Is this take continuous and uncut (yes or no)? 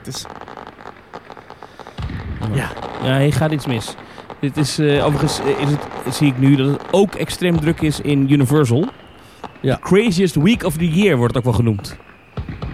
yes